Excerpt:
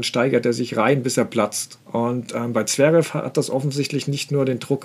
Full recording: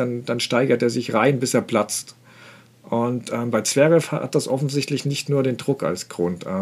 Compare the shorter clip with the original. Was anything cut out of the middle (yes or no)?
yes